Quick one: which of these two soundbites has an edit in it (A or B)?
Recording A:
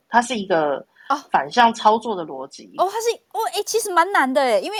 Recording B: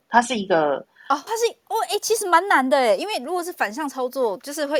B